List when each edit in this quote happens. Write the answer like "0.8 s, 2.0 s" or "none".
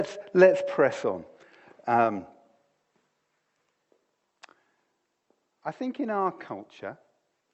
none